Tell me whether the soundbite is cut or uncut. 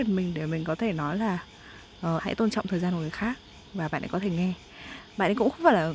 cut